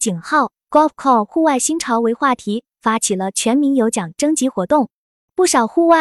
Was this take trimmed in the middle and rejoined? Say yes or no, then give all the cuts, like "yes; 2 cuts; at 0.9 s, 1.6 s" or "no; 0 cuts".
no; 0 cuts